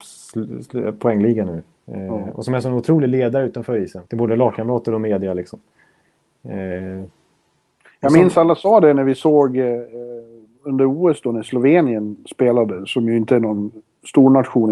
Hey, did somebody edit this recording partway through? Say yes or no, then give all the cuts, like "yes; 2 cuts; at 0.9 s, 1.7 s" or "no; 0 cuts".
yes; 1 cut; at 4.1 s